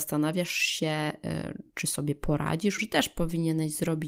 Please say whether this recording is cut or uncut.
cut